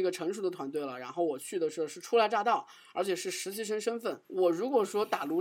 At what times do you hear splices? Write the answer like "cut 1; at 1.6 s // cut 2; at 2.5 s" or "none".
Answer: cut 1; at 4.2 s

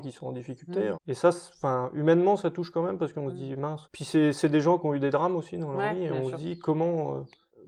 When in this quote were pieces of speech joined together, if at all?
cut 1; at 3.9 s

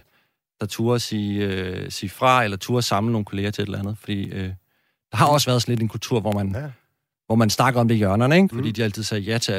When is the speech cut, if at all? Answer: cut 1; at 8.5 s

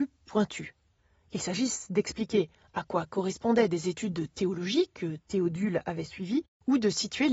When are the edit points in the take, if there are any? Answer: none

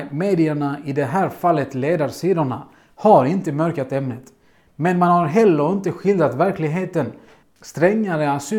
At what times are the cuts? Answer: cut 1; at 7.4 s

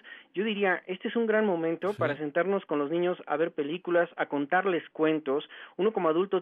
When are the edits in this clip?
none

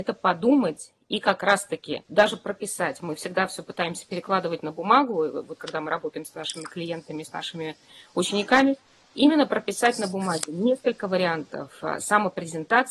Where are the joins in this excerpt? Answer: cut 1; at 2.0 s

